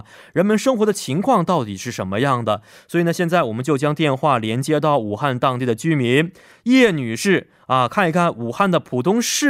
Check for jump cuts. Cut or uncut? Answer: uncut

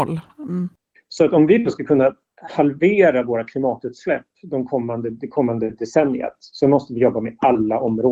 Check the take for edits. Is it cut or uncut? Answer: cut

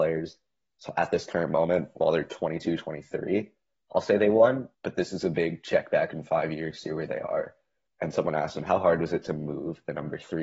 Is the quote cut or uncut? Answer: cut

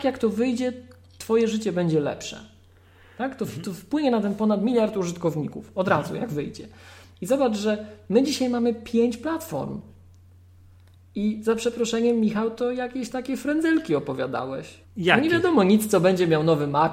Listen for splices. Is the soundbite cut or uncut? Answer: cut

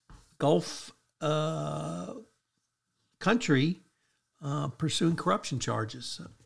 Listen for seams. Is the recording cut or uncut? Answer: uncut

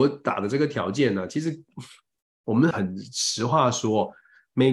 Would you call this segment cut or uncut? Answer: cut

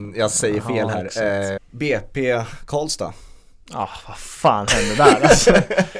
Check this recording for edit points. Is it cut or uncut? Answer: cut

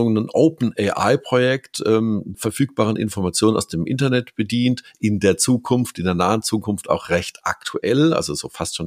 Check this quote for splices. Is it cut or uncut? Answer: cut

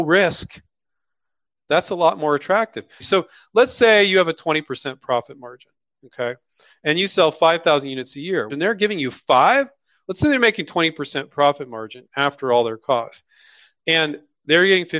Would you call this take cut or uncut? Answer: cut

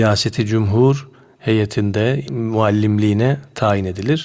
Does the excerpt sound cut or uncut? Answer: cut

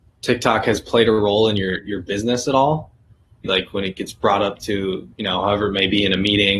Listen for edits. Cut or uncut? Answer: cut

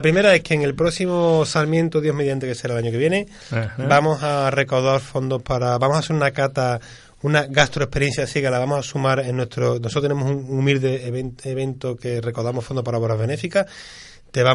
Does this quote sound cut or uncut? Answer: uncut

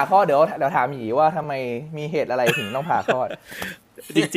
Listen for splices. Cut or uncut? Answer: uncut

